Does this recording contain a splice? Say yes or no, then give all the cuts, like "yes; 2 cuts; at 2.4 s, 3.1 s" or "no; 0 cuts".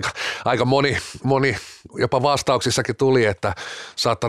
yes; 1 cut; at 1.2 s